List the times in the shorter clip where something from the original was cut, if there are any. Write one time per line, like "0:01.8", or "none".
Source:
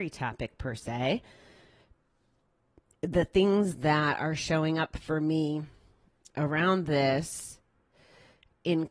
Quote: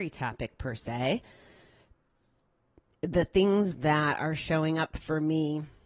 none